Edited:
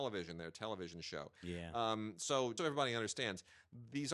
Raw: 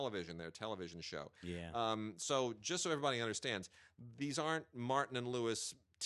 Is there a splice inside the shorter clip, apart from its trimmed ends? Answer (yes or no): yes